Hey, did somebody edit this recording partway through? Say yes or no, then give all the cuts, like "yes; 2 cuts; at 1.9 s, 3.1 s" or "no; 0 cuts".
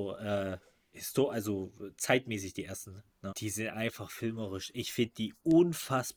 yes; 1 cut; at 3.3 s